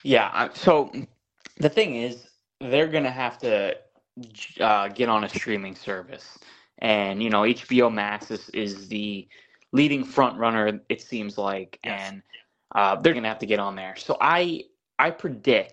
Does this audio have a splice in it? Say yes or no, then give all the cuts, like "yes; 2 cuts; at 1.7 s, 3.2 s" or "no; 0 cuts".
yes; 1 cut; at 13.1 s